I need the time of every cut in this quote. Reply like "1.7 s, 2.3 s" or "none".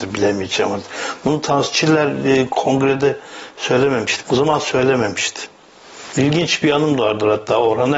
4.2 s, 6.1 s